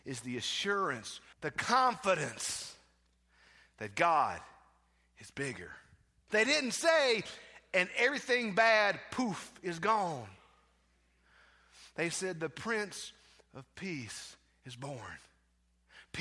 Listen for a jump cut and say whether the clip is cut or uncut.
cut